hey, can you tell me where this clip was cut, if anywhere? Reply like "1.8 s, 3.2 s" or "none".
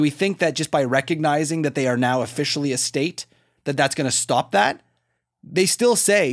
none